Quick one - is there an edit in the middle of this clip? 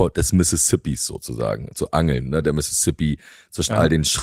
no; 0 cuts

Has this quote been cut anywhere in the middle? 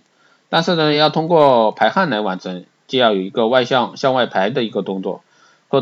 no; 0 cuts

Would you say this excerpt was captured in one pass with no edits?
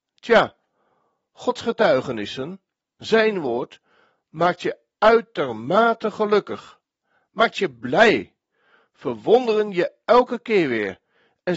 yes; 0 cuts

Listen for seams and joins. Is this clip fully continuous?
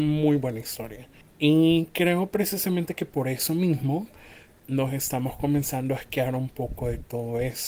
yes; 0 cuts

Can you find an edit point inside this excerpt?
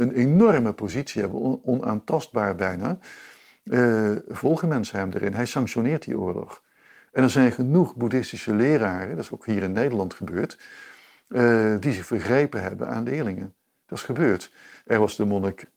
no; 0 cuts

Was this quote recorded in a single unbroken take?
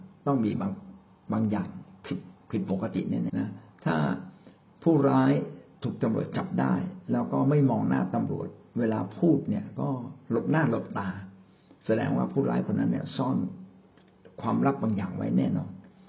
no; 1 cut; at 3.3 s

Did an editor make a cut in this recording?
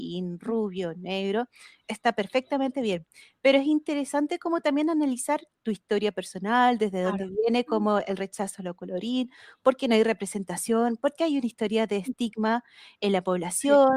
no; 0 cuts

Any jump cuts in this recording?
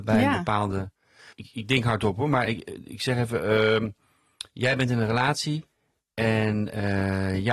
no; 0 cuts

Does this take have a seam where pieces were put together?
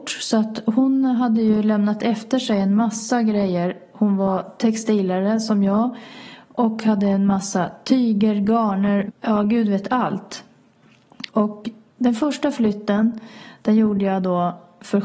yes; 2 cuts; at 9.1 s, 11.3 s

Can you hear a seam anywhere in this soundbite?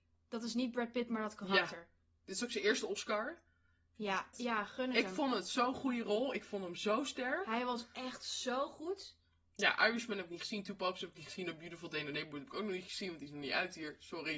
yes; 1 cut; at 4.3 s

